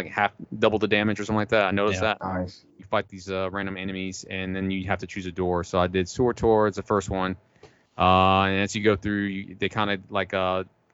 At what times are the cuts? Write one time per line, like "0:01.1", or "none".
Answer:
0:02.8